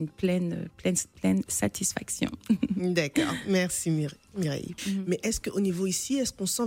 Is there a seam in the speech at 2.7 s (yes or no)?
no